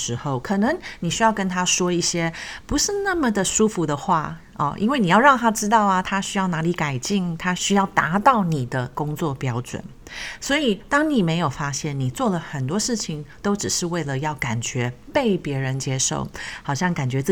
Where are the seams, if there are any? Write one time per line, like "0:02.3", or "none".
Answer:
0:07.6